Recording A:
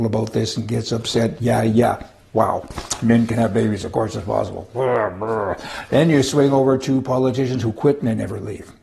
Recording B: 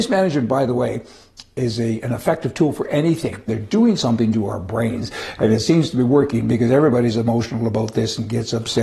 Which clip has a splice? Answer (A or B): B